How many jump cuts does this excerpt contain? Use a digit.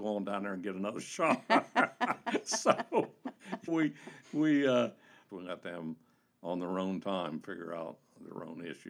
2